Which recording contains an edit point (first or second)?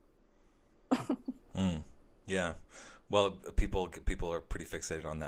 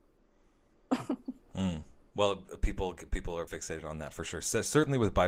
second